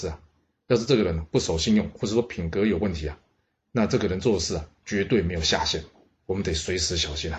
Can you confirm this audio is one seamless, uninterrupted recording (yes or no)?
no